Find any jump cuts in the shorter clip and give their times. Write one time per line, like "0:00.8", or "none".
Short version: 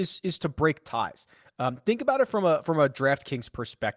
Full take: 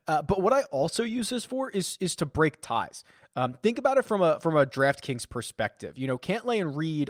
none